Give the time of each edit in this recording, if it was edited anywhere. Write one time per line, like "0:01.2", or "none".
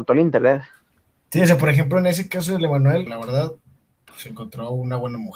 0:03.1
0:04.1